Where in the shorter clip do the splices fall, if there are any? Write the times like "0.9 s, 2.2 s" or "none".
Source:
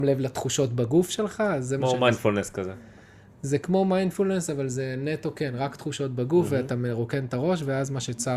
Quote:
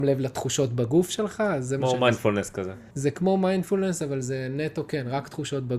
2.9 s